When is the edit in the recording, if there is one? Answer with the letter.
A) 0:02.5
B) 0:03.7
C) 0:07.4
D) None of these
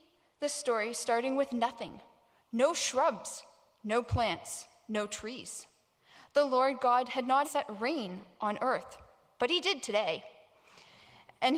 C